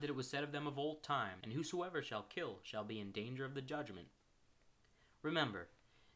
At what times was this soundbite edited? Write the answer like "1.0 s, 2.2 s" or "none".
1.4 s